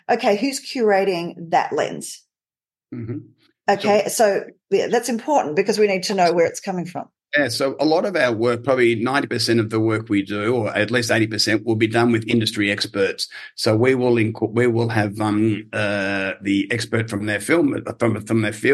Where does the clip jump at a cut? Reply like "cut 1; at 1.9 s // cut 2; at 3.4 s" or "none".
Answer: none